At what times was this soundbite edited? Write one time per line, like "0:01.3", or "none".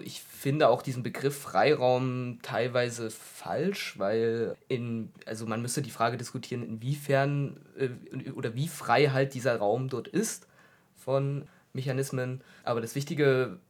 none